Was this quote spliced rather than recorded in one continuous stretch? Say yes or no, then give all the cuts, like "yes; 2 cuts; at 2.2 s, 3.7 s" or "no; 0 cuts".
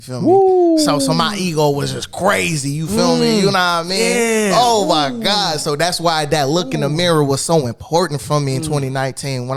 no; 0 cuts